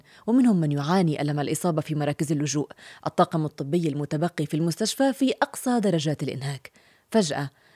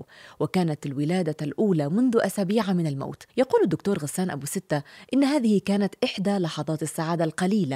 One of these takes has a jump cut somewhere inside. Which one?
second; 1 cut; at 3.3 s

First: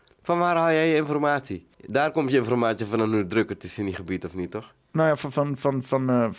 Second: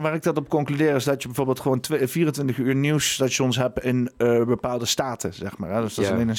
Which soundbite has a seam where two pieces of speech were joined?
first; 1 cut; at 1.7 s

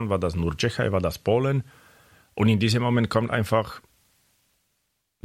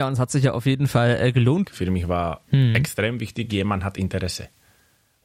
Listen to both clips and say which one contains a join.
second; 1 cut; at 1.6 s

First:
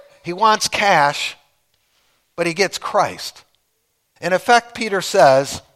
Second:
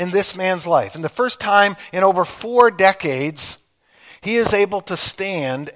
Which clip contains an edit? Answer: first; 1 cut; at 4.2 s

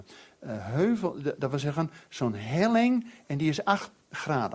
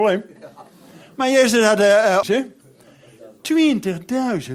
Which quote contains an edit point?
second; 1 cut; at 2.2 s

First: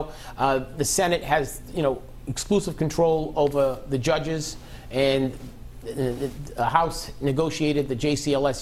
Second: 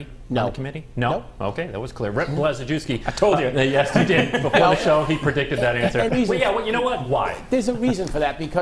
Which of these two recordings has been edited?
second; 1 cut; at 6.1 s

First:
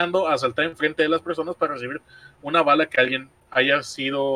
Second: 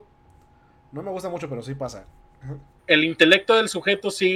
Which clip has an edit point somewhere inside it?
second; 1 cut; at 2.8 s

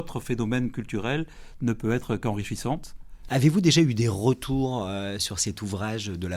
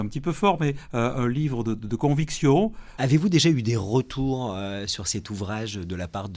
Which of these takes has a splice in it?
second; 1 cut; at 3.0 s

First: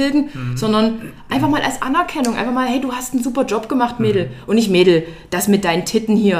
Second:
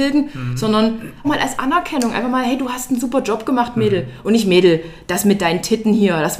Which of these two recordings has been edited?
second; 1 cut; at 1.2 s

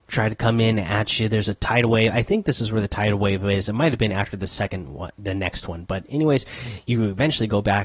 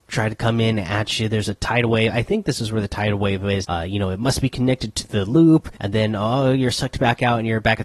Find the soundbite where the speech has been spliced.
second; 2 cuts; at 3.6 s, 5.8 s

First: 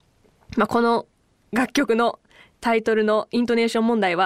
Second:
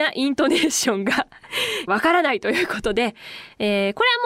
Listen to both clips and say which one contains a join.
second; 1 cut; at 1.9 s

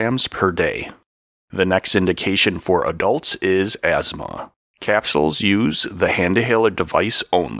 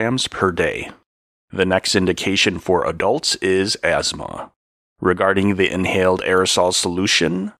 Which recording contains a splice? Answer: first; 1 cut; at 4.7 s

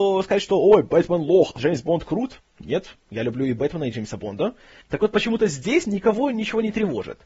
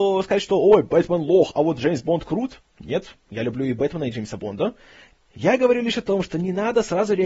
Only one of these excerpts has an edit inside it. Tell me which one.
first; 2 cuts; at 1.6 s, 4.8 s

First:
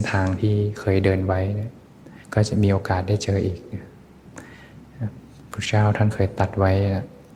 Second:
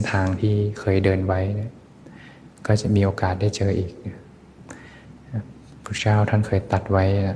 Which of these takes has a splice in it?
first; 1 cut; at 2.2 s

